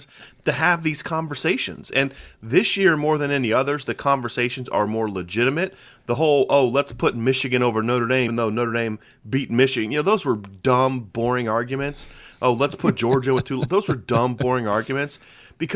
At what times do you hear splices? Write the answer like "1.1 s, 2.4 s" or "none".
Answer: 8.3 s